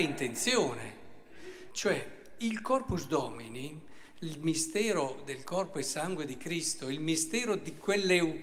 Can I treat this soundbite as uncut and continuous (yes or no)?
no